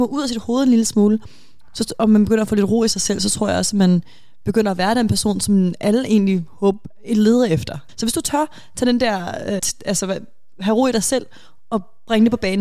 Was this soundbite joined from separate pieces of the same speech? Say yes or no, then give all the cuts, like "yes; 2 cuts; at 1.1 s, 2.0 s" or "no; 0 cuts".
yes; 2 cuts; at 7.9 s, 9.6 s